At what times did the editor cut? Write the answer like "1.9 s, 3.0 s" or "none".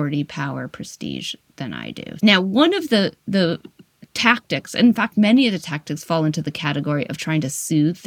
2.2 s